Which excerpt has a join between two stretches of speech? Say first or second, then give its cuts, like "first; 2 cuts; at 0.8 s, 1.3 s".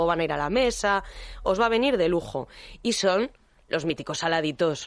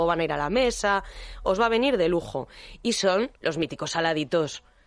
second; 1 cut; at 3.4 s